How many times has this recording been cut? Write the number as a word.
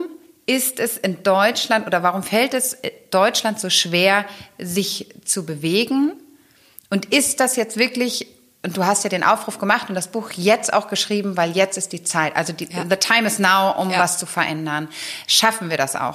zero